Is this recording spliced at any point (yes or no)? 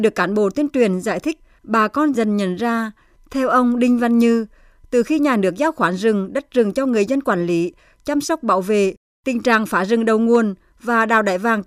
yes